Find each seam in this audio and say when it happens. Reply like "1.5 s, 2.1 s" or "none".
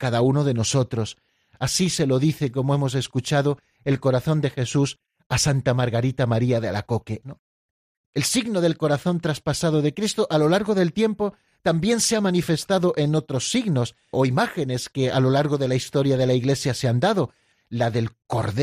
7.2 s, 14.1 s, 17.5 s